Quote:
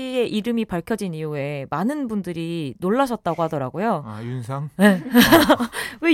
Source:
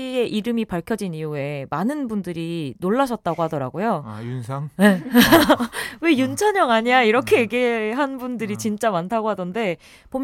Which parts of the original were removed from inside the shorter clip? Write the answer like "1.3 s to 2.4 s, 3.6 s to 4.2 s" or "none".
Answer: none